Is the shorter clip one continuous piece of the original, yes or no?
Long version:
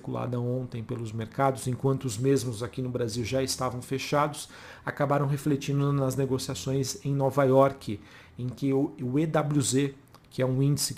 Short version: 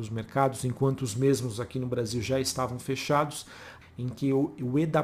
no